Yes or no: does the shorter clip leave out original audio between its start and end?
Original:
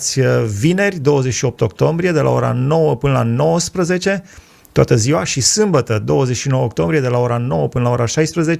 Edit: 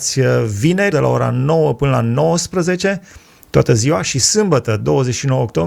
yes